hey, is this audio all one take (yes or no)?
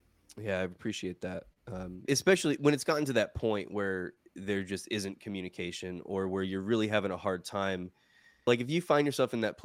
no